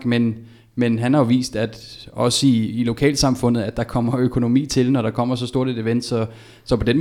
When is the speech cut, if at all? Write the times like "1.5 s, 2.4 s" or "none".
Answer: none